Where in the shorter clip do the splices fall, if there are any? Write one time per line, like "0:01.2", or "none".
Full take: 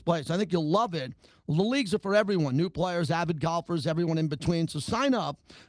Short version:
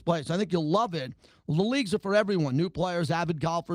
none